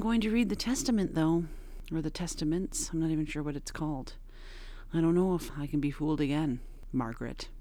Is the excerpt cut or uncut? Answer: uncut